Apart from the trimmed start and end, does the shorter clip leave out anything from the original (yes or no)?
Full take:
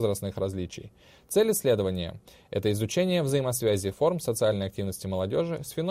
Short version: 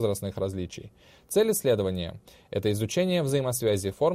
no